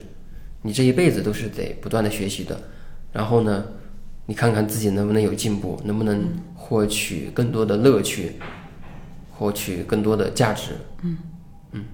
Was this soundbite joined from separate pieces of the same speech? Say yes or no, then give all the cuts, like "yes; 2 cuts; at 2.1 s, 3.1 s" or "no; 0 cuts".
no; 0 cuts